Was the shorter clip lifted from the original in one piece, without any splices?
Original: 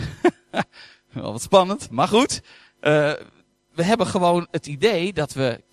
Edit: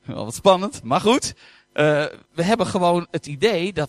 no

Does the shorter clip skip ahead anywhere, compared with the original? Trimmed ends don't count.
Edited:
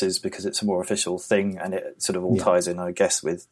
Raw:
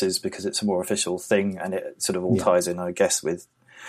no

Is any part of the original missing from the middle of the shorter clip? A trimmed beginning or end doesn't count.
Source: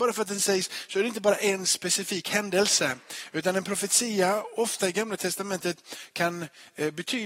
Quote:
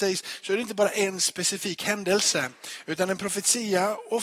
no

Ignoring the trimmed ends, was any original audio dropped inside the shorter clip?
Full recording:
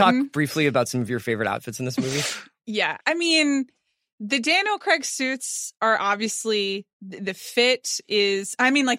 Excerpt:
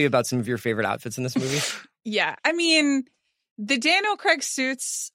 no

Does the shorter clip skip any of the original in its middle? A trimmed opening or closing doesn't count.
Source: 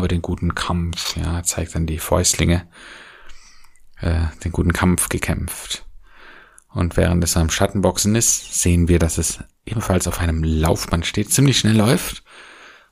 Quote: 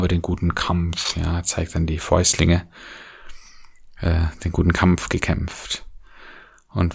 no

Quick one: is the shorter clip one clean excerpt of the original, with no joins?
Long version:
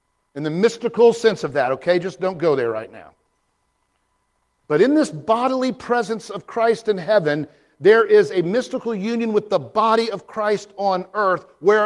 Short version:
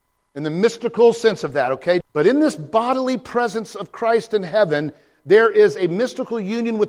no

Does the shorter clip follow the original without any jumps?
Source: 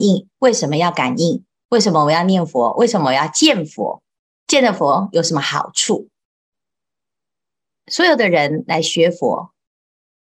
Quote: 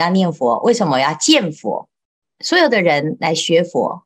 no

